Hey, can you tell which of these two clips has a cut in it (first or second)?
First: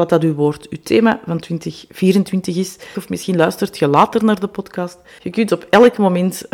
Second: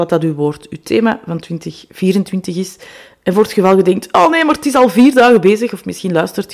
first